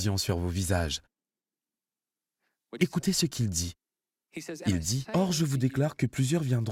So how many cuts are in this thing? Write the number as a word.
one